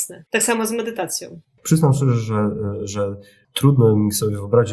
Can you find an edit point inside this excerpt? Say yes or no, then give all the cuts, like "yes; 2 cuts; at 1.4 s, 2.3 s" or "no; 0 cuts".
no; 0 cuts